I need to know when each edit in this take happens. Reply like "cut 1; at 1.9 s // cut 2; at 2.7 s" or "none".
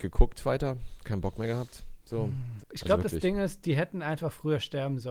cut 1; at 2.6 s